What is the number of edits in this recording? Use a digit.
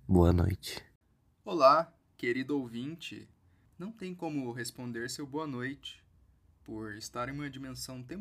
0